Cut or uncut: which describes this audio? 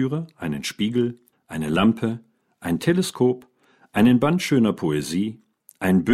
cut